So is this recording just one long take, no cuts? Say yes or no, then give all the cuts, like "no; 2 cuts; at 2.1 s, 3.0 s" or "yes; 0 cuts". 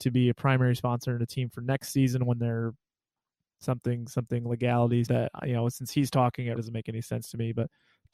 no; 2 cuts; at 5.1 s, 6.6 s